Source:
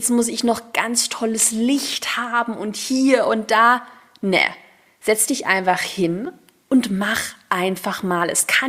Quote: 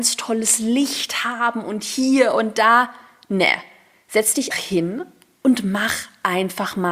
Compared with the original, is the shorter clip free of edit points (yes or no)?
no